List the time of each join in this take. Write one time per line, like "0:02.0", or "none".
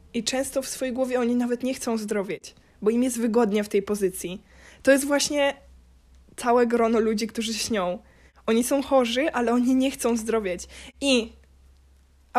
none